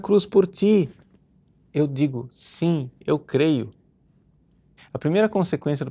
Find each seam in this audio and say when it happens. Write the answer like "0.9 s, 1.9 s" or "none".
4.8 s